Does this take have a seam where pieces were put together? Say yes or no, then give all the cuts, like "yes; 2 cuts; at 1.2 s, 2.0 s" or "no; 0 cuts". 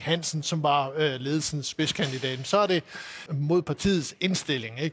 yes; 1 cut; at 3.3 s